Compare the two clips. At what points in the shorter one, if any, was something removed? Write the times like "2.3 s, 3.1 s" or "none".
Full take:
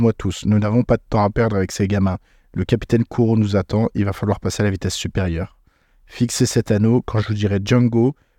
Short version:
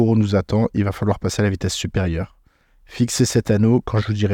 none